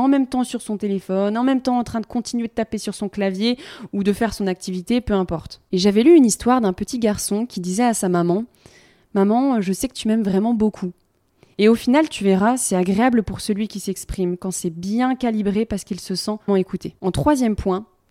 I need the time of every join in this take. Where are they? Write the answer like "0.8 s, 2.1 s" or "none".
11.5 s, 16.5 s